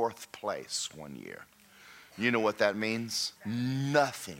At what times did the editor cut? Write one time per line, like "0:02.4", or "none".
0:03.4